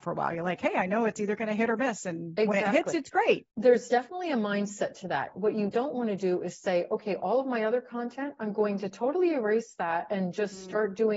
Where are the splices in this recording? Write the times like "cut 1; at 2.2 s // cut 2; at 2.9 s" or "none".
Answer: none

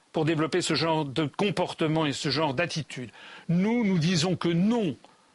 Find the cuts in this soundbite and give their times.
none

